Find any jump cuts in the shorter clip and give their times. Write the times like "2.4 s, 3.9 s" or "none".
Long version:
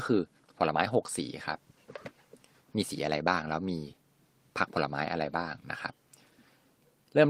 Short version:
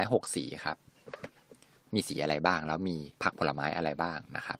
3.1 s